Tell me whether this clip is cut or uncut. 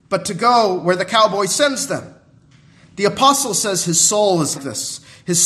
cut